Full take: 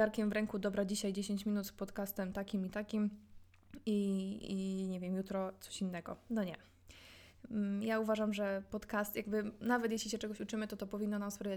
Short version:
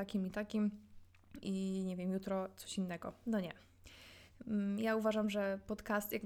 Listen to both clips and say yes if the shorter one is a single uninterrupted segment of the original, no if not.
no